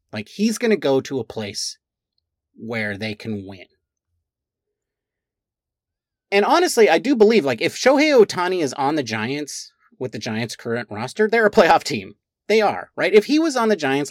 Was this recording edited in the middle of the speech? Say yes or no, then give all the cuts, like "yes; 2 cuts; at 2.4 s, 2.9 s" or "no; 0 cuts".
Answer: no; 0 cuts